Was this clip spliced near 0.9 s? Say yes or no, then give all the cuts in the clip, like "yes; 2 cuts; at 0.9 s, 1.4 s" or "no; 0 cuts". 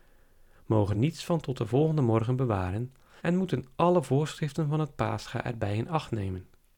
yes; 2 cuts; at 0.9 s, 3.2 s